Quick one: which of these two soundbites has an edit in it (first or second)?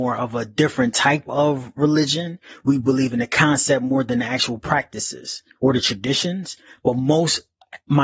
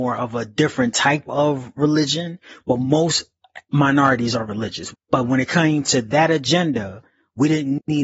second